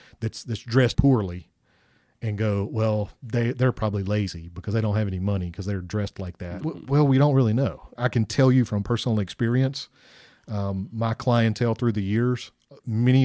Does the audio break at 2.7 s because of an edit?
no; 3 cuts; at 0.9 s, 6.6 s, 8.0 s

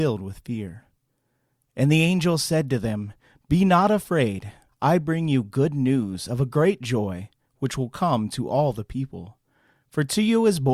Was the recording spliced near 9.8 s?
no; 1 cut; at 4.7 s

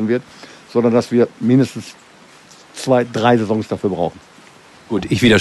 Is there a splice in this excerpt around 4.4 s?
no; 0 cuts

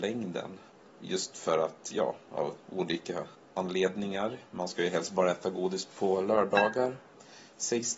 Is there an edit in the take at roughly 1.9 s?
no; 0 cuts

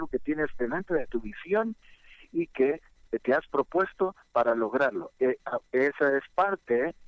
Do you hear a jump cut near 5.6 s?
yes; 1 cut; at 5.6 s

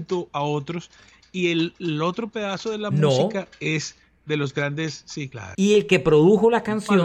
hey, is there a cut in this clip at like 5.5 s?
yes; 1 cut; at 5.5 s

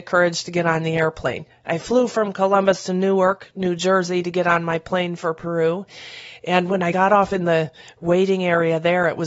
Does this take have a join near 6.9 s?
yes; 1 cut; at 6.9 s

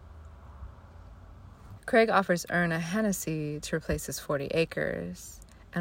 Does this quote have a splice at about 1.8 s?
yes; 1 cut; at 1.8 s

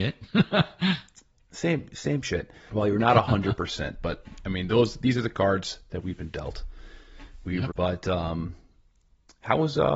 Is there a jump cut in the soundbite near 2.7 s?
yes; 2 cuts; at 2.7 s, 7.7 s

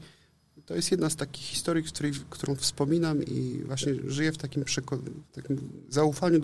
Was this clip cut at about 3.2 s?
yes; 1 cut; at 3.2 s

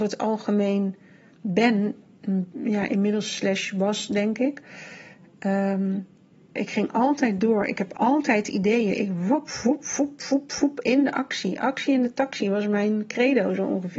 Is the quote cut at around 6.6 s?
yes; 1 cut; at 6.6 s

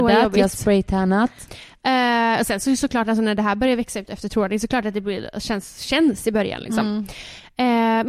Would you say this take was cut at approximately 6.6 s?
no; 1 cut; at 1.5 s

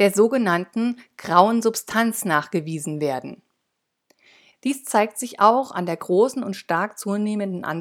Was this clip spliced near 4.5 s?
yes; 1 cut; at 4.5 s

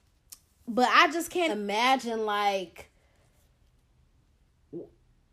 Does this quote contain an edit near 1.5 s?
yes; 1 cut; at 1.5 s

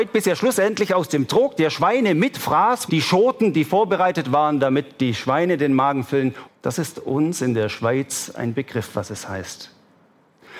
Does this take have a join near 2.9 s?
yes; 2 cuts; at 2.9 s, 6.5 s

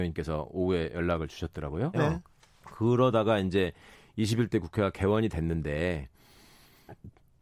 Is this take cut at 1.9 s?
yes; 1 cut; at 1.9 s

